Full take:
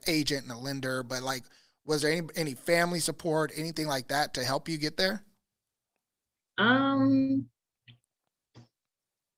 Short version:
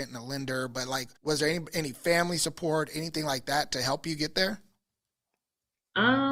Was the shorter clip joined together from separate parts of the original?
yes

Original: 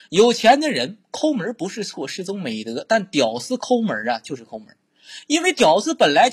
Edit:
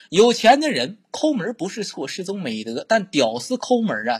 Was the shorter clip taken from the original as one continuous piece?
yes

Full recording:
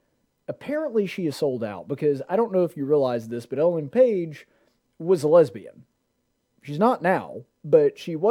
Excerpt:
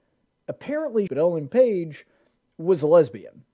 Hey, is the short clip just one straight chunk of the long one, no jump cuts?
no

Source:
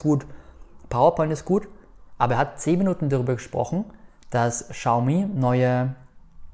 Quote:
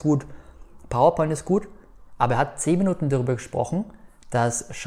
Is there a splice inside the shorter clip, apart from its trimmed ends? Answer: no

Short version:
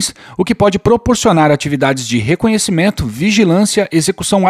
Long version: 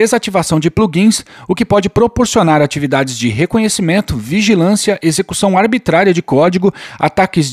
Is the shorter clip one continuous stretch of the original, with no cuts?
yes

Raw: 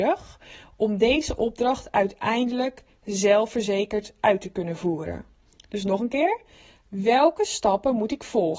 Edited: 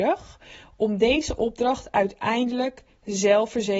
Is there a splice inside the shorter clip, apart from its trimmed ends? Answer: no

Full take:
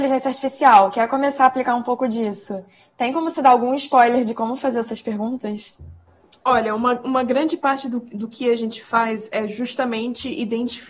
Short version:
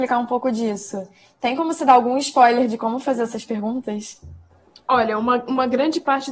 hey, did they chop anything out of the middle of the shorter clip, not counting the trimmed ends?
no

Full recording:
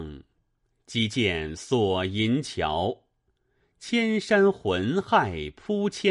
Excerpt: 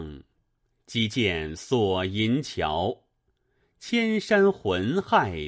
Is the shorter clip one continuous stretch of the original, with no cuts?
yes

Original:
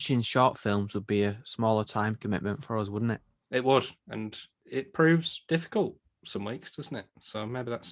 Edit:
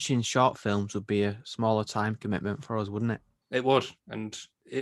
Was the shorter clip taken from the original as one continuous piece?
yes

